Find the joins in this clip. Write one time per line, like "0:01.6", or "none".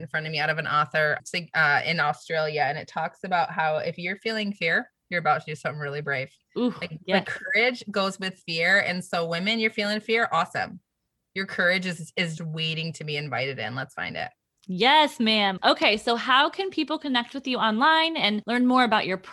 0:12.4
0:15.6

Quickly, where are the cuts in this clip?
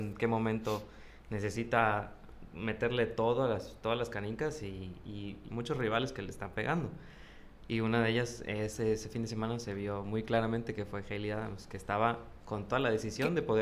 0:05.5

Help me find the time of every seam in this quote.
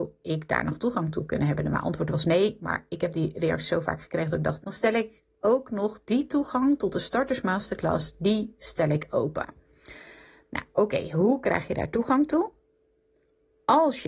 0:04.6

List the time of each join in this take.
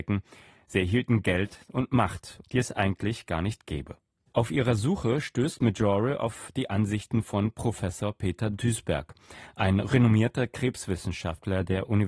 0:02.4
0:04.3

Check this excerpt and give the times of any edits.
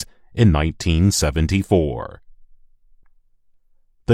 none

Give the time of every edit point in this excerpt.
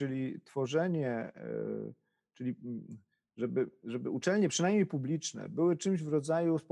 none

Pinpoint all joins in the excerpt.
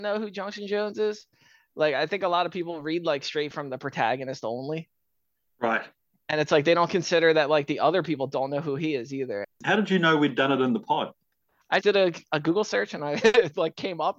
0:09.4
0:11.8

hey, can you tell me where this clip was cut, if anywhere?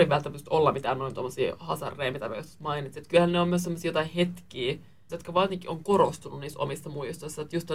0:05.1

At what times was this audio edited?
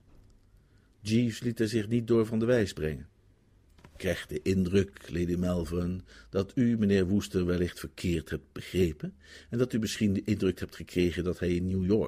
0:03.7

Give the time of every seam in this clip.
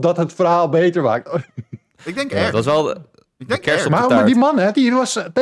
none

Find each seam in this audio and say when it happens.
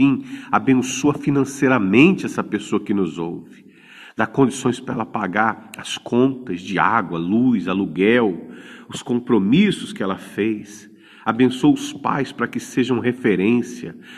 0:11.2

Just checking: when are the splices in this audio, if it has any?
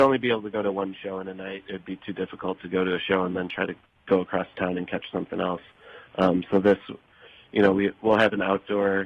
none

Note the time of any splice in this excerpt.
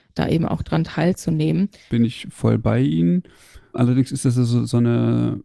0:01.9

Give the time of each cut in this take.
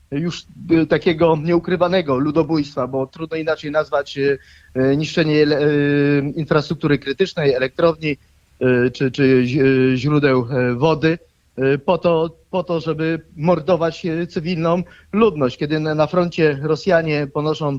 none

